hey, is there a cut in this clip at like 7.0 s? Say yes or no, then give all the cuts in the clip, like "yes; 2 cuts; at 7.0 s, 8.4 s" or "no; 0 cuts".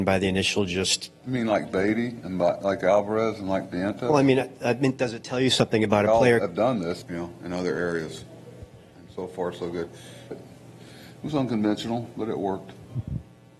yes; 2 cuts; at 7.0 s, 10.3 s